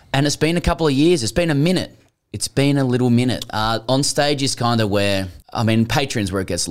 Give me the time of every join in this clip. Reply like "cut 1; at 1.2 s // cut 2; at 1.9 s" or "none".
cut 1; at 5.4 s